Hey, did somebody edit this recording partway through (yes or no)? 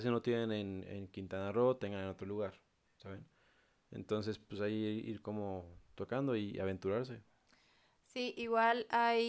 no